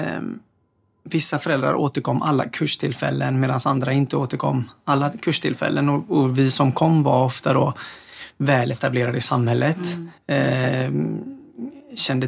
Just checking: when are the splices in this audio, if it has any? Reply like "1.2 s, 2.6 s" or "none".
none